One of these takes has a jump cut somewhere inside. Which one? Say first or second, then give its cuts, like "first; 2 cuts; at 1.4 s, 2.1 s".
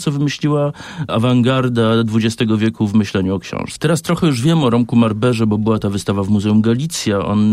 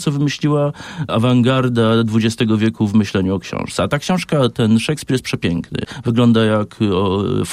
first; 1 cut; at 3.8 s